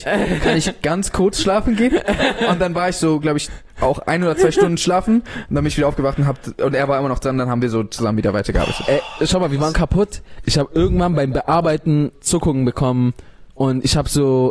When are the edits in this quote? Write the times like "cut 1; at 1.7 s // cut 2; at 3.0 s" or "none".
cut 1; at 9.7 s // cut 2; at 12.1 s